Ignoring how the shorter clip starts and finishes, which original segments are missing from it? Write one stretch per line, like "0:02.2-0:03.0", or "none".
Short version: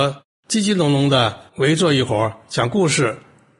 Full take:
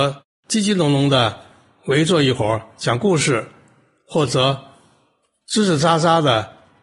0:01.5-0:01.8